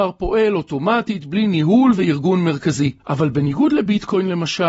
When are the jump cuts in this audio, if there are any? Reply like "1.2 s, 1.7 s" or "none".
3.0 s